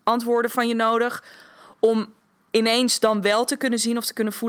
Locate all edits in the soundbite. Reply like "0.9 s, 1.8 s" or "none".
none